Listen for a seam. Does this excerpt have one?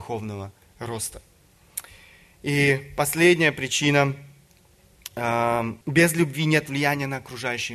yes; 1 cut; at 5.8 s

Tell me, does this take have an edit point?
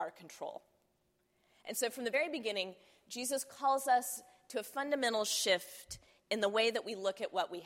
no; 0 cuts

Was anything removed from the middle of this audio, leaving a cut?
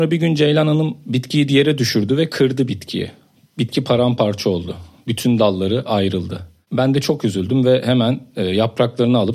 no; 0 cuts

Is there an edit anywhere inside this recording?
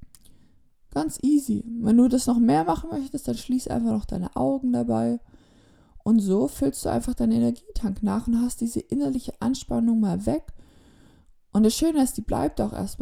no; 0 cuts

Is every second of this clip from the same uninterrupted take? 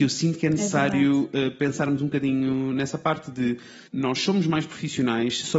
no; 1 cut; at 3.9 s

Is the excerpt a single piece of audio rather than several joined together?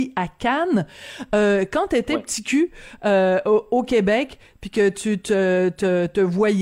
yes; 0 cuts

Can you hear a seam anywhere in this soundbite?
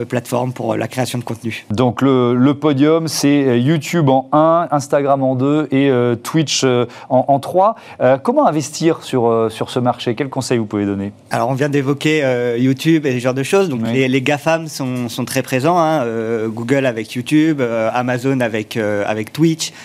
no; 0 cuts

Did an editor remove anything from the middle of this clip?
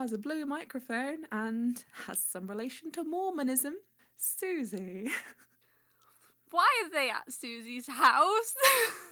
no; 0 cuts

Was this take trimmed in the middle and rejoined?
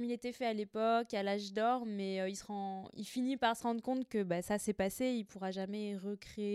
no; 0 cuts

